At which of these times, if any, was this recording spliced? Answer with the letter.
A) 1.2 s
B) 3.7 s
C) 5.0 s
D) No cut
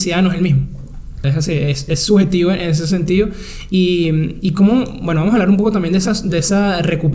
A